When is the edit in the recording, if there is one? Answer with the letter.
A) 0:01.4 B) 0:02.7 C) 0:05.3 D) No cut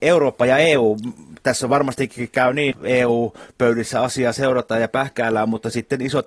B